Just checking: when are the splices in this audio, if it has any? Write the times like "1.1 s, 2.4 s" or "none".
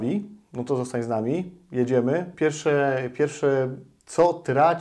none